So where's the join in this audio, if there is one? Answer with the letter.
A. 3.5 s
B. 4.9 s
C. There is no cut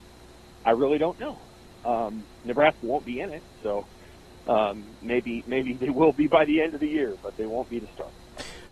A